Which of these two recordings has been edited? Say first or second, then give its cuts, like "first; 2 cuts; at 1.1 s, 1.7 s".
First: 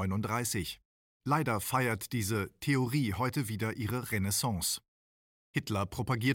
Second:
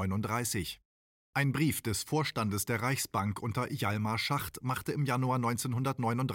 first; 1 cut; at 1.2 s